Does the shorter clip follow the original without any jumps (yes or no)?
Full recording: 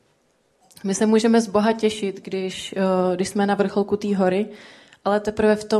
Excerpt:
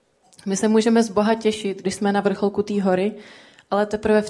no